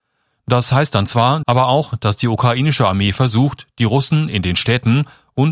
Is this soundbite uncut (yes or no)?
no